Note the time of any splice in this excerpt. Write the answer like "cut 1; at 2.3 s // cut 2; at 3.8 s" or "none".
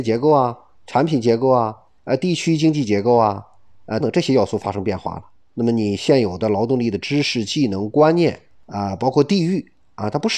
cut 1; at 4.0 s